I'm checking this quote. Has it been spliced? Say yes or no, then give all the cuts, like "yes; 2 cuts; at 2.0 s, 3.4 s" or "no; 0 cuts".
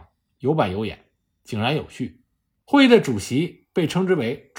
yes; 1 cut; at 2.6 s